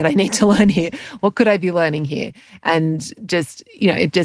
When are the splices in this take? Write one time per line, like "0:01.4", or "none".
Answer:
none